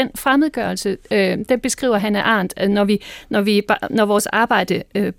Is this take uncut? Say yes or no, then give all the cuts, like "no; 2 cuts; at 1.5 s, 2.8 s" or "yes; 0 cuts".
yes; 0 cuts